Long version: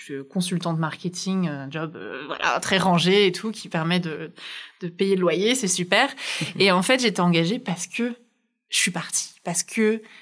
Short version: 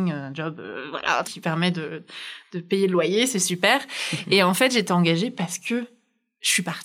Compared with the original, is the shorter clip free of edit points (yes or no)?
no